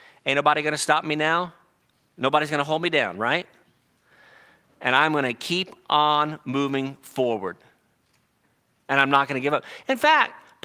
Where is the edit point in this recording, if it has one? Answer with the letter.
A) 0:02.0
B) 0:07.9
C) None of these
C